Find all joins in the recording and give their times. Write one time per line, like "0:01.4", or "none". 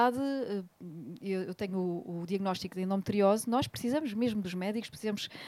none